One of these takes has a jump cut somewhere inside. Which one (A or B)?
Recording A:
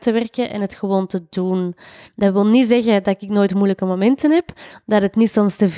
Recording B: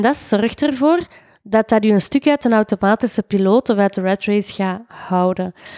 A